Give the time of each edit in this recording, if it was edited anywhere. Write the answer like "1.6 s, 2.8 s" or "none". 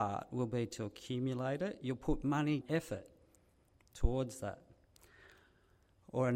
2.6 s